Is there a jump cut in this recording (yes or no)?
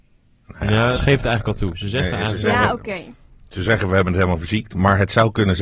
yes